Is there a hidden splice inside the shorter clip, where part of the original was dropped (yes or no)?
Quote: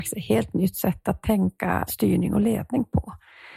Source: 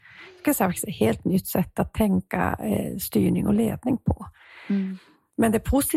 yes